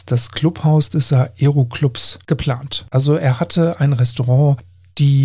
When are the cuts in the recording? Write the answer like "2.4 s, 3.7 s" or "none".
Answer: 2.9 s